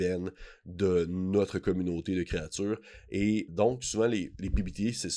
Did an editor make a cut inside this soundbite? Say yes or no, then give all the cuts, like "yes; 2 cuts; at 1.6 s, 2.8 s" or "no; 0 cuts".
yes; 1 cut; at 3.5 s